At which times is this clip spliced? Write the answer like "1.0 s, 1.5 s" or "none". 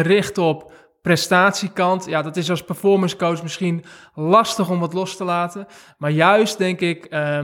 none